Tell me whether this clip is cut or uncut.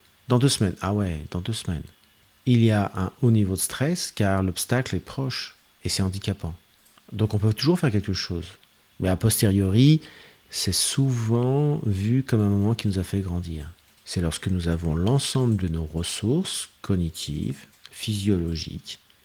cut